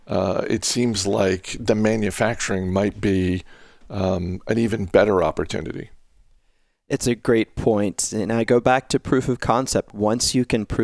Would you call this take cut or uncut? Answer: uncut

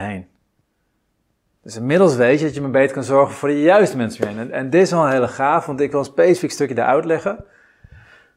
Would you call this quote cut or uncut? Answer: uncut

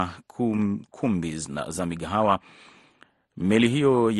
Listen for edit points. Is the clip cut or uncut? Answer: uncut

